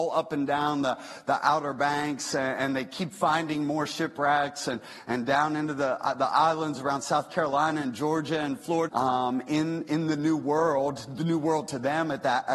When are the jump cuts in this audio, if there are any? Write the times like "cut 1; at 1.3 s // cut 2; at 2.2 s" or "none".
cut 1; at 8.9 s